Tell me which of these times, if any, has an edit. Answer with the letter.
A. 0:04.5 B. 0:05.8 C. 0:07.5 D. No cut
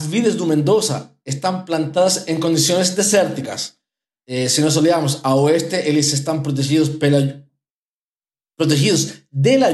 D